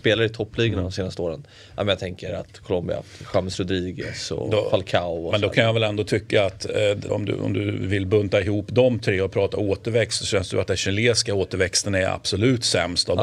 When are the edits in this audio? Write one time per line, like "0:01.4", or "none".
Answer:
0:07.1